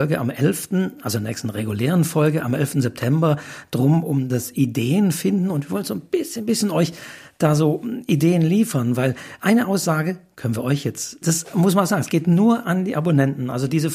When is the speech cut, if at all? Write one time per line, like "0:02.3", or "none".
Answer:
0:11.2